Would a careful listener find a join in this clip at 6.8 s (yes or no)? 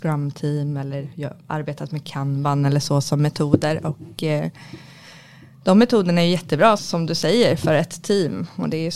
yes